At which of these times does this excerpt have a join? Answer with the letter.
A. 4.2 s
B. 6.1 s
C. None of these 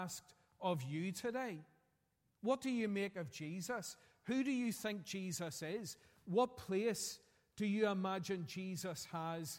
C